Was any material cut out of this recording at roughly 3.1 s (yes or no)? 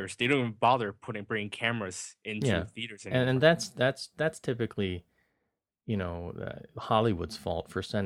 no